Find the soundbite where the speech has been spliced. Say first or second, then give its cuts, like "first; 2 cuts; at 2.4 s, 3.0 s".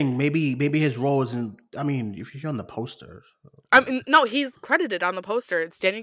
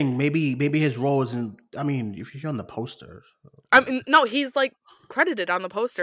first; 1 cut; at 4.5 s